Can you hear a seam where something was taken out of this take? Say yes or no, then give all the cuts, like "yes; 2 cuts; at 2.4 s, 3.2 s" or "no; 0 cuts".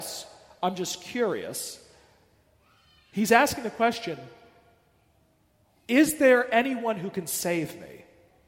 no; 0 cuts